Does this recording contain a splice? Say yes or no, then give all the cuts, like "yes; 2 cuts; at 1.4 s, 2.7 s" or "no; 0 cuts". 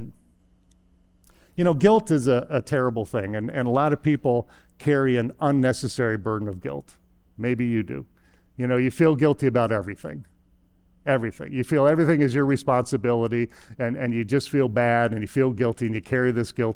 no; 0 cuts